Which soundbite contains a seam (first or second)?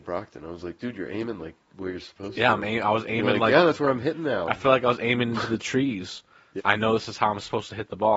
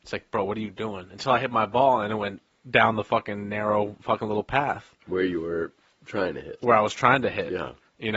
first